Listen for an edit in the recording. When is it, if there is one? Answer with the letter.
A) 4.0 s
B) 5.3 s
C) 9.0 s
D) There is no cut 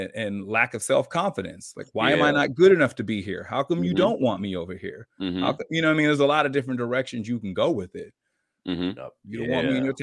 C